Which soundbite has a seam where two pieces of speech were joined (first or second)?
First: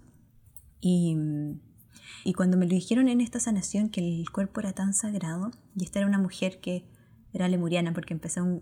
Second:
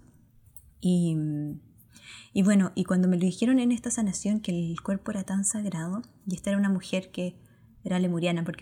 first